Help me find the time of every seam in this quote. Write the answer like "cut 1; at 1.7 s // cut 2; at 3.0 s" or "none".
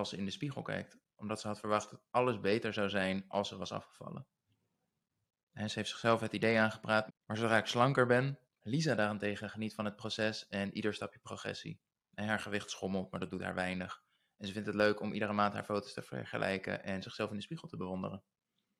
cut 1; at 7.1 s // cut 2; at 8.4 s